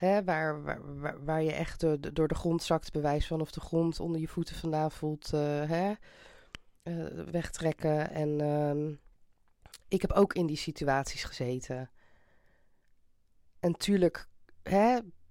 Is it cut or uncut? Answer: uncut